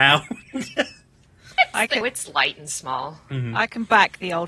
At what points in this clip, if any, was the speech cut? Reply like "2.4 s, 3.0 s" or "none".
2.0 s